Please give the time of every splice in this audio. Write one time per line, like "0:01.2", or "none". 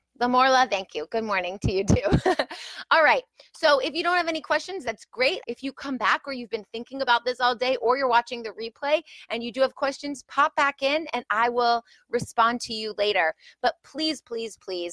0:05.4